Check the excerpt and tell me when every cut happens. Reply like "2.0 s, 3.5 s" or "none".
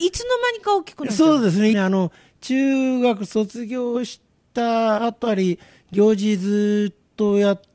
1.7 s